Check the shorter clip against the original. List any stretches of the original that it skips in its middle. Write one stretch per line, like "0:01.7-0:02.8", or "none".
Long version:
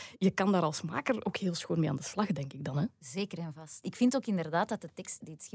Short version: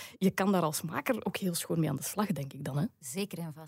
none